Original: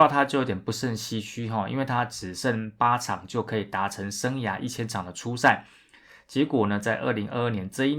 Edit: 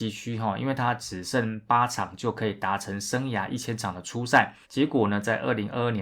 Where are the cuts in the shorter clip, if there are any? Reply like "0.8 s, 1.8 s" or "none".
4.6 s